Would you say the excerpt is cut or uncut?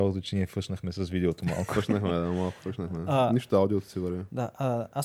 uncut